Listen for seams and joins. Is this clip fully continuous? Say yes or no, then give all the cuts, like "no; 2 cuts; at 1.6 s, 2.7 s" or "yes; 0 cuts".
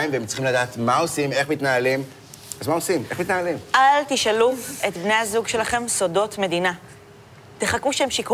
yes; 0 cuts